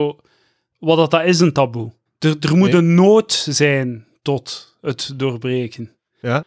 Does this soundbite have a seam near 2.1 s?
yes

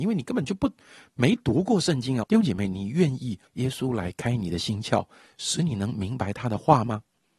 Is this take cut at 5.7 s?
no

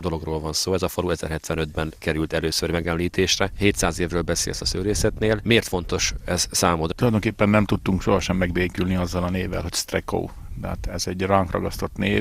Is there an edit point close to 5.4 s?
no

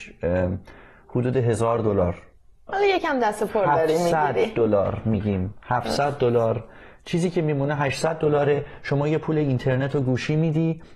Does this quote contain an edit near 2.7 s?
yes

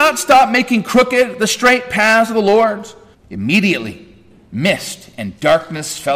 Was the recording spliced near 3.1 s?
yes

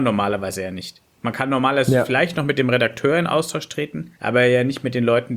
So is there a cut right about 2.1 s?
no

